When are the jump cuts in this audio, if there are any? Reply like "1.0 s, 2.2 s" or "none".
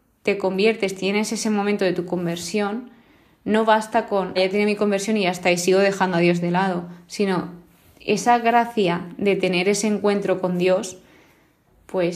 4.4 s